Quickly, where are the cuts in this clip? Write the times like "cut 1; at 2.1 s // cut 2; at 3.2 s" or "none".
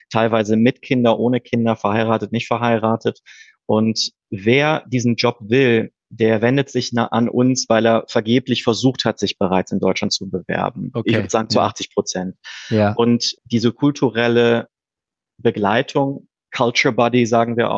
cut 1; at 13.3 s